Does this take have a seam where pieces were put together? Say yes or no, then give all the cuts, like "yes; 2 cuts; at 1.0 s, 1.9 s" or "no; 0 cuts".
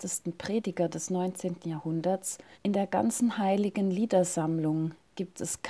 yes; 1 cut; at 2.5 s